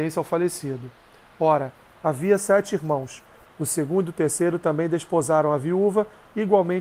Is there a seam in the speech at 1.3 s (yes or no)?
no